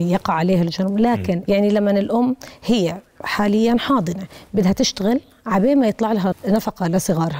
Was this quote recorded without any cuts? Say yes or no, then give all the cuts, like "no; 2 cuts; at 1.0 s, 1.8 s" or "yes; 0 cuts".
no; 2 cuts; at 1.4 s, 6.3 s